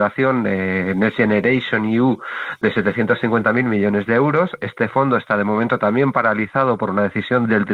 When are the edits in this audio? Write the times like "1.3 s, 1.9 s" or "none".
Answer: none